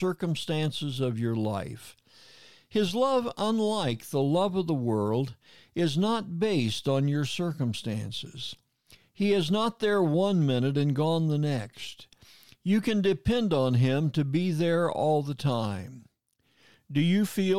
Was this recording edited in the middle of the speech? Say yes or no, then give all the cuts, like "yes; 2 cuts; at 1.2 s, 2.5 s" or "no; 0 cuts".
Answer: no; 0 cuts